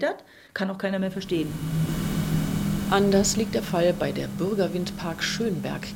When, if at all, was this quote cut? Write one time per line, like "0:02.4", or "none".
none